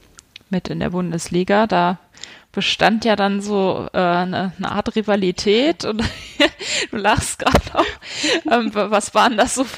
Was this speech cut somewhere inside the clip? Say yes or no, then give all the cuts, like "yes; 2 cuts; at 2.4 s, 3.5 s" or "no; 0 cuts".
no; 0 cuts